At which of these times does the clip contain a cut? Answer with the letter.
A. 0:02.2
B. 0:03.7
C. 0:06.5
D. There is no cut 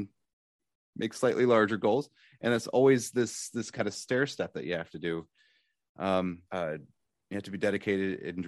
C